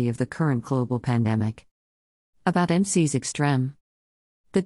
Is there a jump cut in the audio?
no; 0 cuts

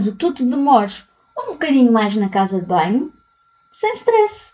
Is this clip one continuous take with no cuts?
yes; 0 cuts

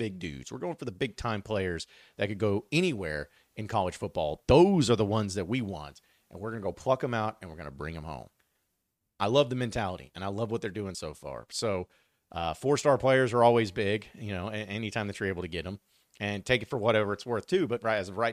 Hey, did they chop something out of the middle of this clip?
no; 0 cuts

